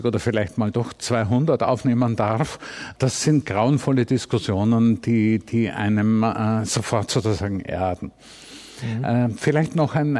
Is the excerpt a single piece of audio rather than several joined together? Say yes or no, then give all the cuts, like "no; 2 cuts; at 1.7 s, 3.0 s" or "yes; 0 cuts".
yes; 0 cuts